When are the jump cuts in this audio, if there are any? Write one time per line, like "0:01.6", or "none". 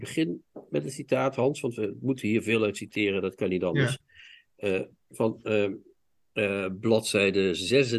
none